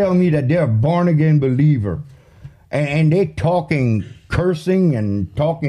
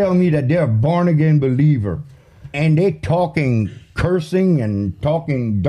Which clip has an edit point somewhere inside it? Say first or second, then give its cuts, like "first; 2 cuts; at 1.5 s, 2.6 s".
second; 1 cut; at 2.5 s